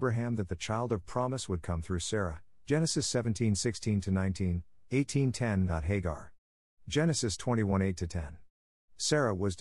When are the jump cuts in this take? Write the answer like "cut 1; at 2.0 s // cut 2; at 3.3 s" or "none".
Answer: cut 1; at 6.7 s